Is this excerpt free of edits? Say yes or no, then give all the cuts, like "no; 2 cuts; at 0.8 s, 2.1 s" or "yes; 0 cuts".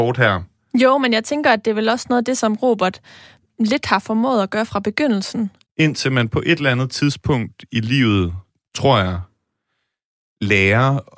no; 1 cut; at 5.6 s